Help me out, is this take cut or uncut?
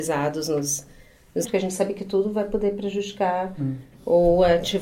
cut